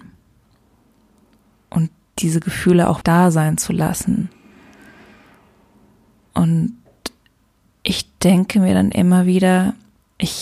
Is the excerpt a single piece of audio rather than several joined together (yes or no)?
no